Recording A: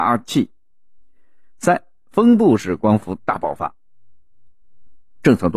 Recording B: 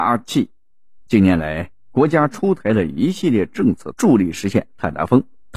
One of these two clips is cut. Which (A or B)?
B